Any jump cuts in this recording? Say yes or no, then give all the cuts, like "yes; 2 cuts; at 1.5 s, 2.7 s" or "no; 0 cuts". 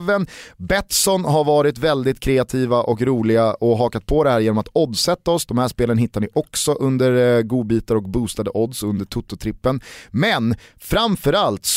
yes; 1 cut; at 5.5 s